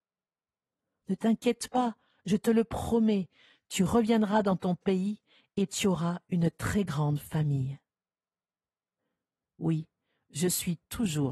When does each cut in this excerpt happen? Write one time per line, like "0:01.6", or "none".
0:01.0

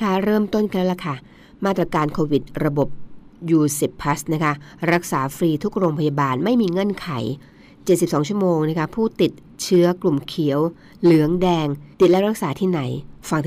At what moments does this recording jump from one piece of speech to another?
0:11.9

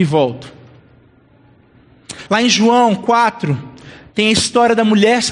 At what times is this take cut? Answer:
0:02.3

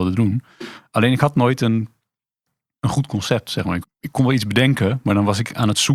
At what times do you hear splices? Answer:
0:03.8

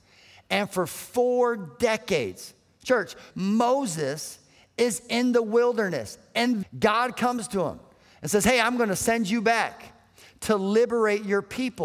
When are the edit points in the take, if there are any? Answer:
0:03.3
0:06.6

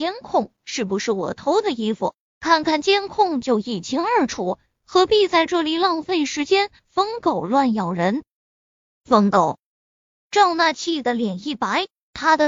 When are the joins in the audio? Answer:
none

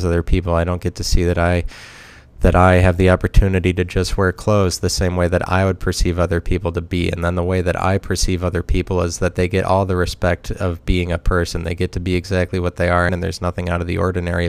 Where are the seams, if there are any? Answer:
0:13.1

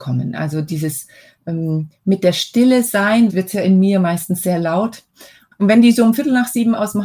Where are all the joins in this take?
0:03.3
0:05.5

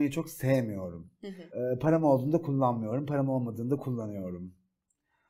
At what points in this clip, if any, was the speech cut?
0:01.5

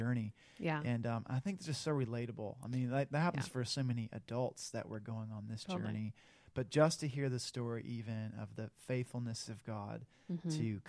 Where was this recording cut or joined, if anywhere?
none

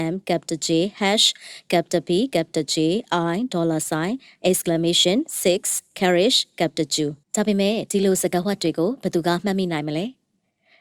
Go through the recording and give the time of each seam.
0:07.2

